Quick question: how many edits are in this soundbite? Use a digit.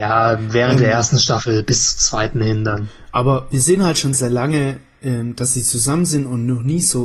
1